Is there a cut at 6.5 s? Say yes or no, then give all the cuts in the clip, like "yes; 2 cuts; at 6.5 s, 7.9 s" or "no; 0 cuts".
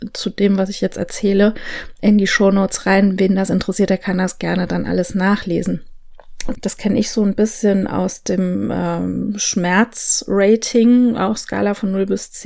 yes; 1 cut; at 6.5 s